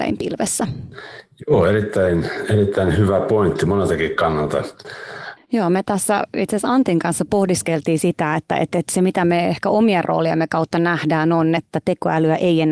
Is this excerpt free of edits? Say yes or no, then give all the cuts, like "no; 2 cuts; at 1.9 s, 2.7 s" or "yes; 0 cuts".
no; 2 cuts; at 5.4 s, 11.6 s